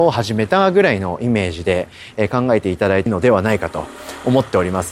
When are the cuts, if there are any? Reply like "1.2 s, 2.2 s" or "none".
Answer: 3.1 s